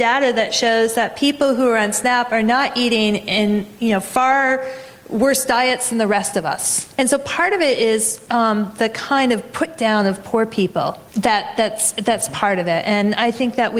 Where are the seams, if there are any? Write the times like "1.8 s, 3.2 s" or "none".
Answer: 6.9 s, 11.1 s